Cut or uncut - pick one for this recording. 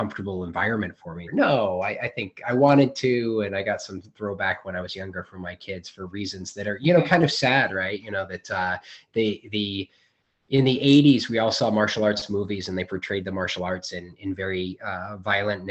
cut